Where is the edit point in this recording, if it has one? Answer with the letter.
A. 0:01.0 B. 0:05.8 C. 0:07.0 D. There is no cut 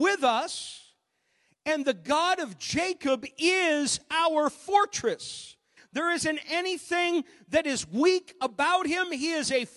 B